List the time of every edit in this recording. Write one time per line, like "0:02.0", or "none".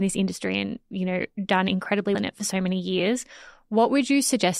0:02.1